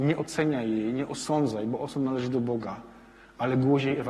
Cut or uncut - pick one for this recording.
uncut